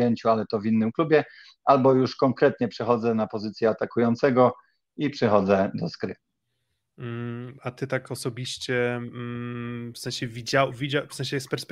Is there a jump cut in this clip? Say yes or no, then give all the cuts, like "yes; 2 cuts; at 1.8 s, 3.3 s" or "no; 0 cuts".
no; 0 cuts